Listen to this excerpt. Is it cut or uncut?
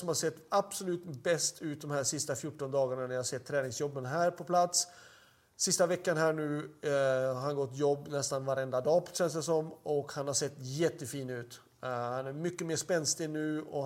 uncut